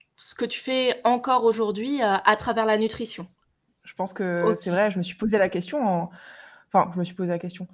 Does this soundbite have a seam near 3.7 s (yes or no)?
yes